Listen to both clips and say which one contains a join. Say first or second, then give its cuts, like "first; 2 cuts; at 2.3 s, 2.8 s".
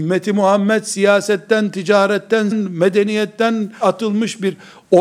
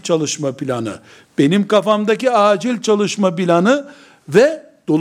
first; 2 cuts; at 2.5 s, 3.8 s